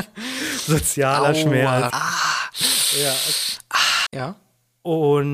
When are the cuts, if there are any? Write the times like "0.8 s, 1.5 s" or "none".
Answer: 1.9 s, 4.1 s